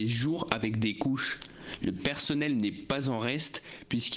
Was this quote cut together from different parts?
no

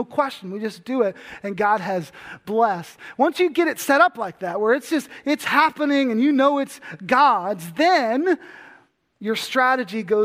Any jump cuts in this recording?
no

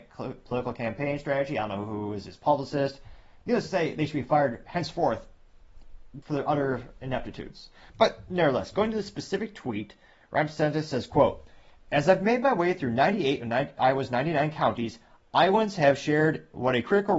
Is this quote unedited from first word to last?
no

